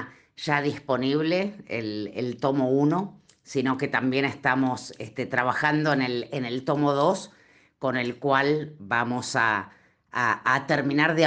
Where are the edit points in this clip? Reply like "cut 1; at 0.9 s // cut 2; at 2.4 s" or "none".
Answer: none